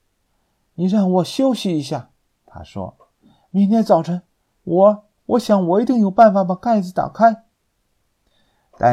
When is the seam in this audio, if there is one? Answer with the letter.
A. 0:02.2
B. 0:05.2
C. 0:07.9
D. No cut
B